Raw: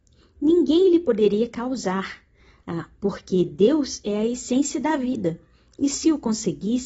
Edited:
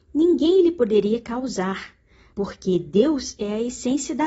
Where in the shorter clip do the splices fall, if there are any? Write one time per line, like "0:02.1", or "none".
0:02.3